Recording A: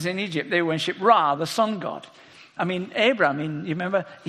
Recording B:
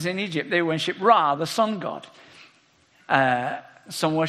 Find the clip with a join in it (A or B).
A